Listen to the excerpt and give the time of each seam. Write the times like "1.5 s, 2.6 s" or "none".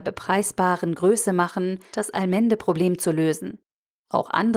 1.9 s